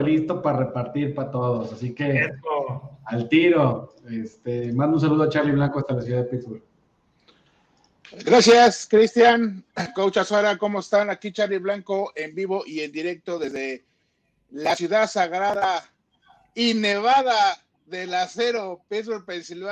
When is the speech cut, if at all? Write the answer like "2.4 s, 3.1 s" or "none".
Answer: none